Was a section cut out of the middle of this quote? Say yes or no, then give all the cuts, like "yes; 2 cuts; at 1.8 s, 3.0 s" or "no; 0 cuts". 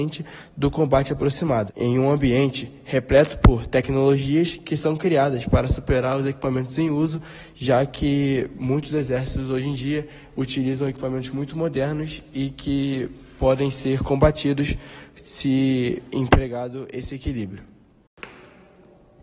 yes; 1 cut; at 1.7 s